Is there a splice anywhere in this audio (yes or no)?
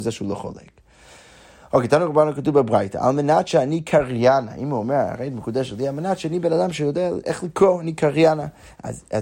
no